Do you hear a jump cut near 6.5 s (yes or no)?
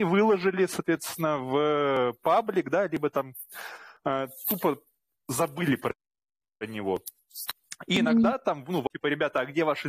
no